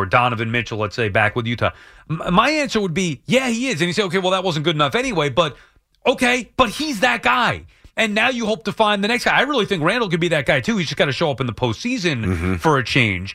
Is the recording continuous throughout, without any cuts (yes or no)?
yes